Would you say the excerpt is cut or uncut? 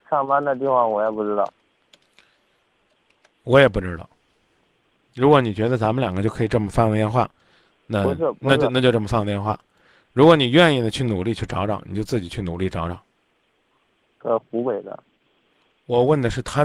cut